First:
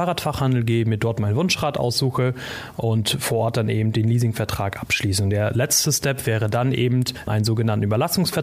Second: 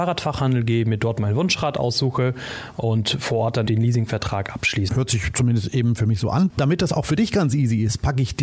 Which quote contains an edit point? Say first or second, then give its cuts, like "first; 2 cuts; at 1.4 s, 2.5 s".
second; 2 cuts; at 3.7 s, 4.9 s